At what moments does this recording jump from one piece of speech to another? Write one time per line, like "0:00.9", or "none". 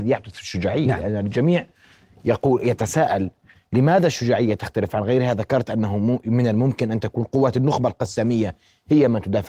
none